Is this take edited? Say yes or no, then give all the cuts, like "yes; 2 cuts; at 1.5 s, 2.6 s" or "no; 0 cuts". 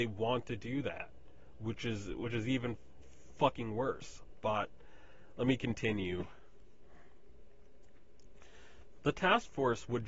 no; 0 cuts